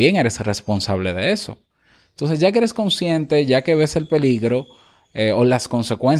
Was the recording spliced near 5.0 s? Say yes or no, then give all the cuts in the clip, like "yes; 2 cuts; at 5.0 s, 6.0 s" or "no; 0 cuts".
no; 0 cuts